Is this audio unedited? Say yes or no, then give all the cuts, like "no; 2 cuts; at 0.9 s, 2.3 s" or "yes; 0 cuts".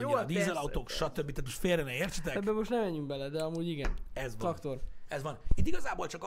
yes; 0 cuts